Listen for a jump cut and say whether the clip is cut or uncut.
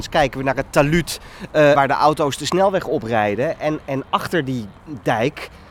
cut